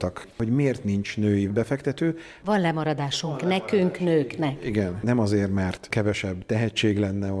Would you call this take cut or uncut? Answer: cut